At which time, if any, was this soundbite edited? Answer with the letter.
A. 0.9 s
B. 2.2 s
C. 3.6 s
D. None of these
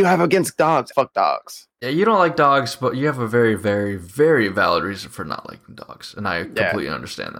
A